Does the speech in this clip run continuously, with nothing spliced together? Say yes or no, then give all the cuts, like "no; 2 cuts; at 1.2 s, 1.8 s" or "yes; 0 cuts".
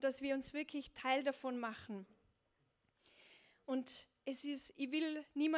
yes; 0 cuts